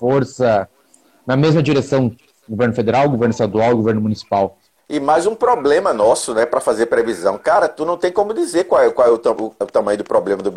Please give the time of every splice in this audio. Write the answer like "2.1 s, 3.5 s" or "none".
4.8 s